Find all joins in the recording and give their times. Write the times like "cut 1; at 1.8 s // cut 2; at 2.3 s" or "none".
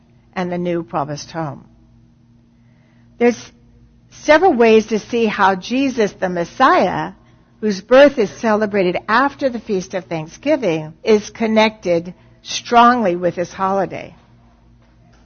cut 1; at 11.0 s